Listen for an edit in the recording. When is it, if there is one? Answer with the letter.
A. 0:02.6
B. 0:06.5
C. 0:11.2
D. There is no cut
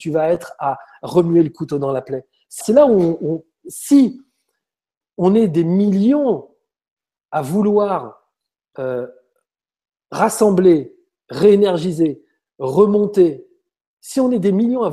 A